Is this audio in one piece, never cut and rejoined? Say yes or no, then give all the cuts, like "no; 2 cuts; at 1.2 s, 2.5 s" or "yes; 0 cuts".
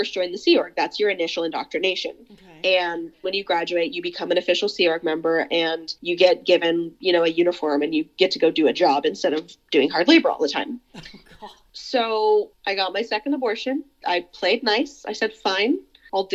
no; 1 cut; at 3.2 s